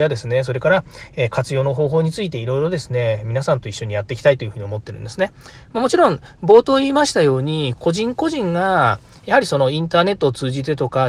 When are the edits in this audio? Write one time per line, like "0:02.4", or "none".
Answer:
0:07.8